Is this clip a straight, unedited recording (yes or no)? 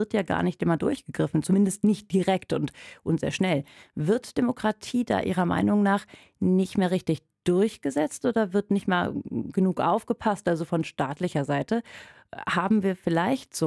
yes